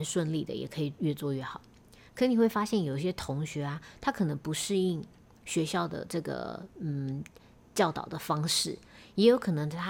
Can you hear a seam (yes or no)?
no